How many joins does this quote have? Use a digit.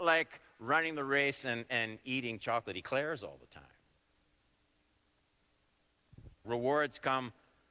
1